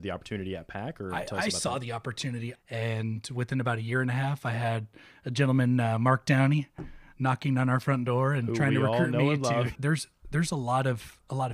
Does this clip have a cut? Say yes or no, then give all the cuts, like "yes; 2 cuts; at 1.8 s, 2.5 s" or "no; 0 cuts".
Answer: yes; 2 cuts; at 2.5 s, 9.7 s